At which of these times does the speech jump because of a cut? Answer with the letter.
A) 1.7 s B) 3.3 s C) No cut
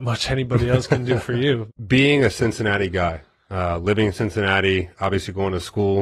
A